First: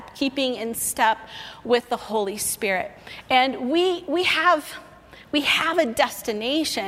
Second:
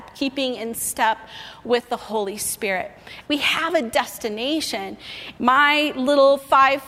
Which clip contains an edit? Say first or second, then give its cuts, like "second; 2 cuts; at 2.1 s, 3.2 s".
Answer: second; 2 cuts; at 3.2 s, 5.4 s